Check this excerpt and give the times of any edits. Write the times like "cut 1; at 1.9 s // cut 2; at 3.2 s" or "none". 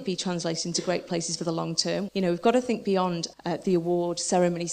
cut 1; at 2.1 s // cut 2; at 3.3 s